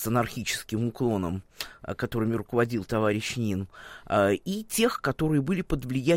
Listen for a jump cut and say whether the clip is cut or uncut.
uncut